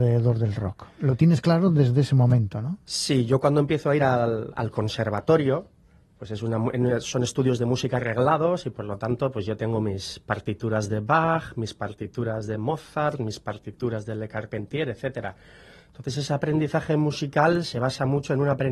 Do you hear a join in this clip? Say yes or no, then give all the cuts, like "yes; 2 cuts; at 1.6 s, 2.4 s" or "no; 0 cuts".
no; 0 cuts